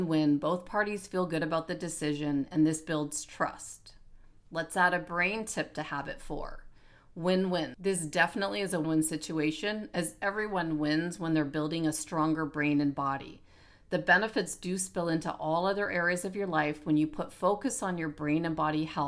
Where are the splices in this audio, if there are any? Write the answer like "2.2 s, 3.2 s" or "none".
7.7 s, 8.8 s

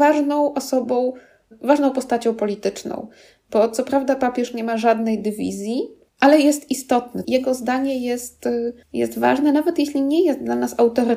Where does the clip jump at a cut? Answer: 6.1 s, 7.2 s, 8.8 s

